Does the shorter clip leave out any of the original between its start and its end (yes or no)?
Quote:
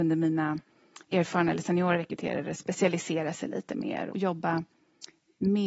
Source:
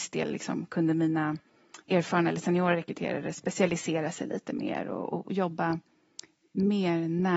yes